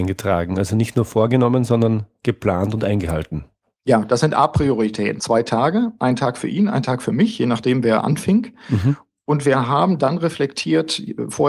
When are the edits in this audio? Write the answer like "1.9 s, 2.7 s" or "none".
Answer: 5.2 s